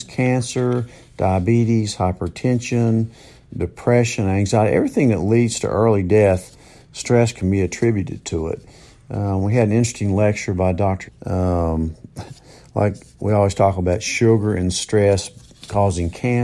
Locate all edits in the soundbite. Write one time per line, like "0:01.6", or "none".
0:11.1